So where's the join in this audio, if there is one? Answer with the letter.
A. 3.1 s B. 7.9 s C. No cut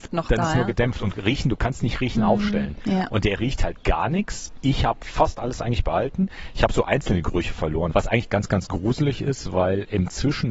B